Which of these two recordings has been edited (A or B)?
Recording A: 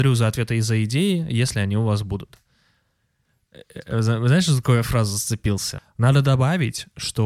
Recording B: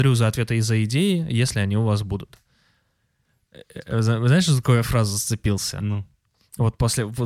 A